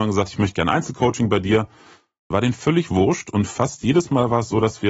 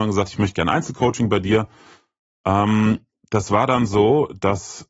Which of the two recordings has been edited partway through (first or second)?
first